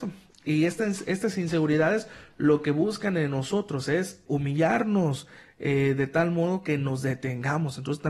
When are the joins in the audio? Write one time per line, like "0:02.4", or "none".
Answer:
0:04.3